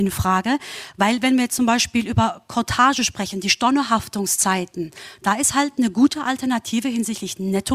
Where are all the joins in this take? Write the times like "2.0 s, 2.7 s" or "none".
5.2 s